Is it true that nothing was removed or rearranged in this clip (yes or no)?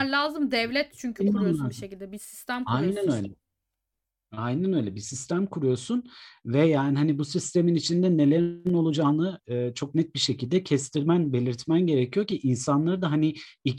yes